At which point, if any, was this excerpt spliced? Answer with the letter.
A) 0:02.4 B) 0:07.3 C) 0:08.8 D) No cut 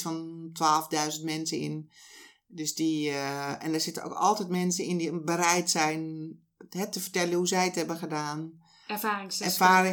D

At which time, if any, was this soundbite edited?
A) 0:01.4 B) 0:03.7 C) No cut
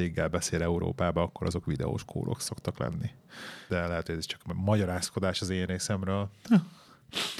B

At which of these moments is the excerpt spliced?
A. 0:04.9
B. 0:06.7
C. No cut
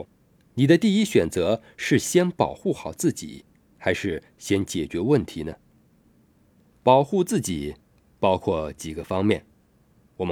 B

